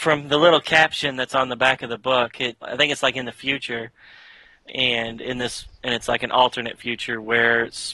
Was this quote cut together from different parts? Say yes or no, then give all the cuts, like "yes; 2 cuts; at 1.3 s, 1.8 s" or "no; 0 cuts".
yes; 1 cut; at 2.6 s